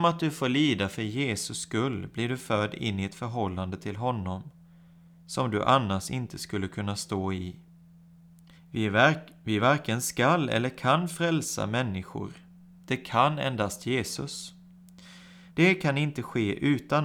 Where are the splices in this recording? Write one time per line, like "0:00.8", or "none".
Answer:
0:08.5
0:15.5

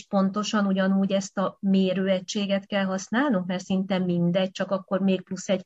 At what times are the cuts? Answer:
none

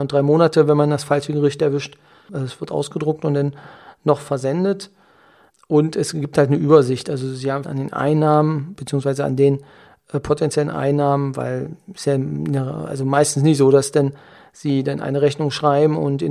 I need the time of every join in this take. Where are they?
0:02.3
0:07.6

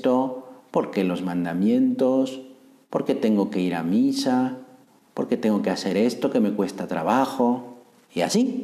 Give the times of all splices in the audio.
none

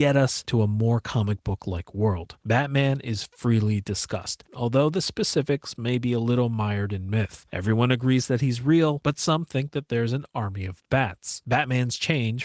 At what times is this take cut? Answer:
0:04.5

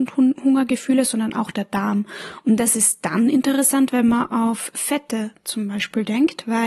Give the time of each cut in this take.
none

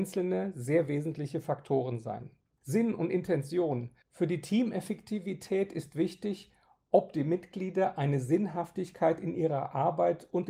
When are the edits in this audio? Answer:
0:02.6

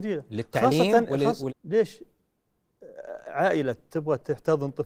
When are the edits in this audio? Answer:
0:01.5

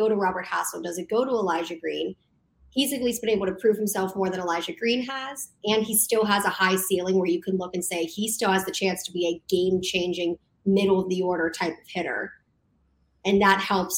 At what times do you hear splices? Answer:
none

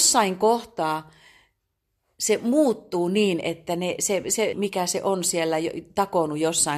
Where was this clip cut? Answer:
0:04.5

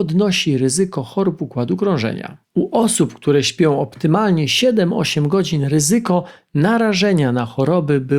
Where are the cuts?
0:02.4

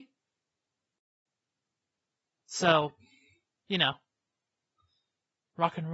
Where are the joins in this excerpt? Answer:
none

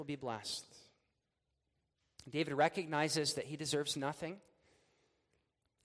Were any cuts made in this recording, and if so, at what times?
none

